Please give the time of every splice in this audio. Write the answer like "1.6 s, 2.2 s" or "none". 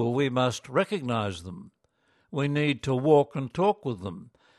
none